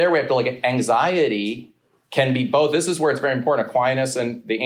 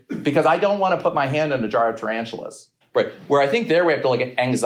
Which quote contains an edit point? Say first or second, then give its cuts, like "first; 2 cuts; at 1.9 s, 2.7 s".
second; 1 cut; at 2.8 s